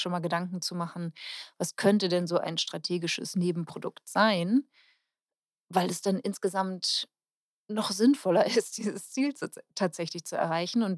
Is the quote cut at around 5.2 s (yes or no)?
no